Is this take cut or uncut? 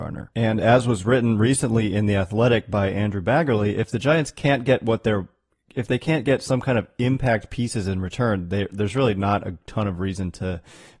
uncut